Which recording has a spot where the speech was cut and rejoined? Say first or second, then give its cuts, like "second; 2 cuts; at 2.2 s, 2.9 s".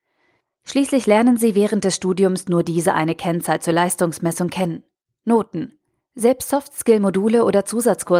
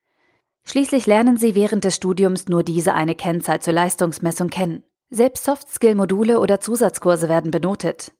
second; 1 cut; at 5.0 s